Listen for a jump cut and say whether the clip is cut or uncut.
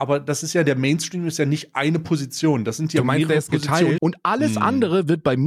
cut